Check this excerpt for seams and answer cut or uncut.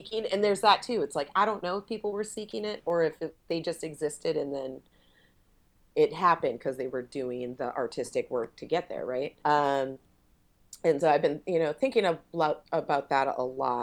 cut